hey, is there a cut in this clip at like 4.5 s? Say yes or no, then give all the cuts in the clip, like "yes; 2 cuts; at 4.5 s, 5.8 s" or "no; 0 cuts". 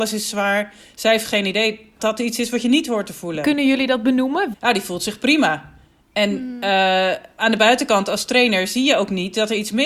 yes; 2 cuts; at 2.0 s, 4.5 s